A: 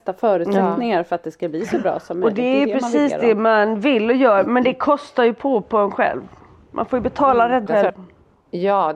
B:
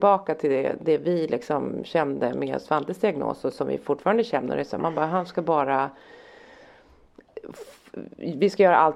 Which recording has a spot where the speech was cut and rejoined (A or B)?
A